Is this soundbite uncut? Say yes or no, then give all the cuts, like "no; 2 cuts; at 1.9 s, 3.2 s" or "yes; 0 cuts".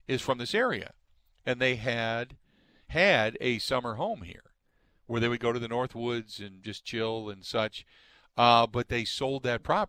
yes; 0 cuts